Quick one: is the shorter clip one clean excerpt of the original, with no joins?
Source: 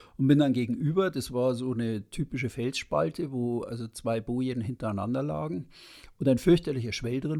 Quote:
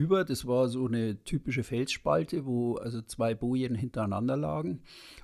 yes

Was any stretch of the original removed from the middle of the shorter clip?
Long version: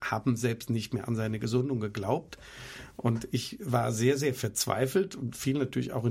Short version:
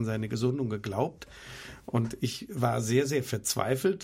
no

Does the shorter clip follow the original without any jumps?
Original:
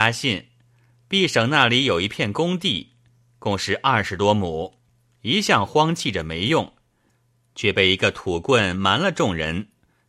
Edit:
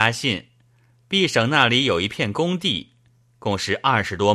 yes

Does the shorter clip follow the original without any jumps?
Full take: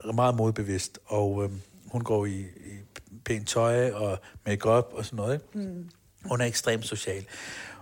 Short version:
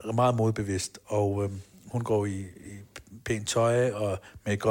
yes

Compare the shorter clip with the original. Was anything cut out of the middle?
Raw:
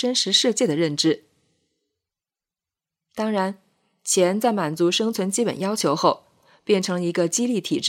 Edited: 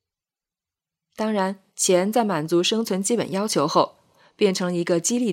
yes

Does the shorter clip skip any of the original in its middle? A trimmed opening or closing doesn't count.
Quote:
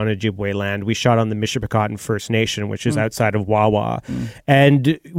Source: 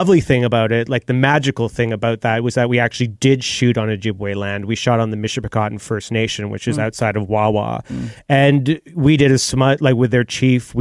no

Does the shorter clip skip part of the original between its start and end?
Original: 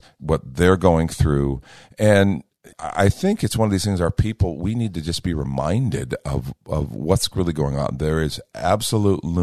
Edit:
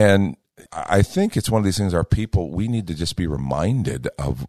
no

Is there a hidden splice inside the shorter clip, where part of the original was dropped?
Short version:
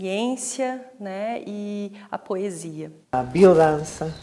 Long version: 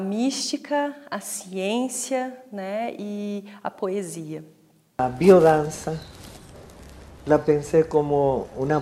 yes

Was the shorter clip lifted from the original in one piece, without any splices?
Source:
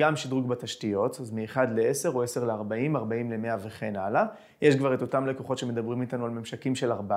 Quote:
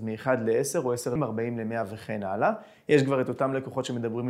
no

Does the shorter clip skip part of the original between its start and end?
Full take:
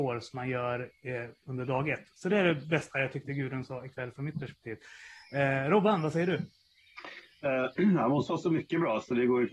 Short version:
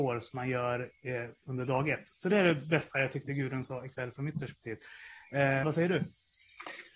yes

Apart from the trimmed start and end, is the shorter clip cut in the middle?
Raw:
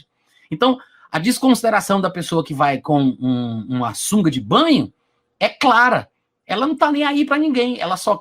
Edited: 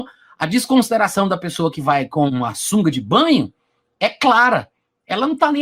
yes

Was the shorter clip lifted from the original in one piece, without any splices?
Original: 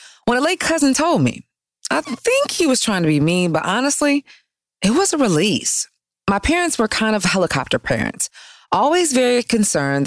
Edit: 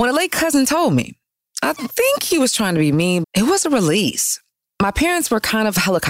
no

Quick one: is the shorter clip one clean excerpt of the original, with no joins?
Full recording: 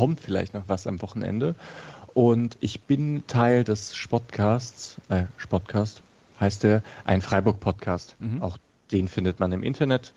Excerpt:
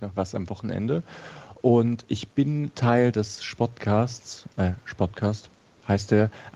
yes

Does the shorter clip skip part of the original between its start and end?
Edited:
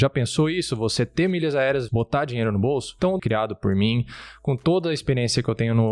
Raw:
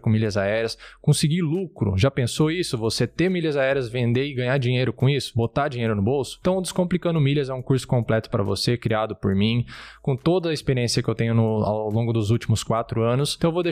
yes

